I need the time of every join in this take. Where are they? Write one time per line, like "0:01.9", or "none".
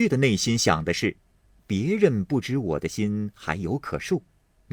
none